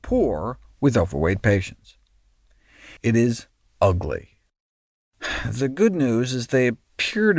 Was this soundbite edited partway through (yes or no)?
yes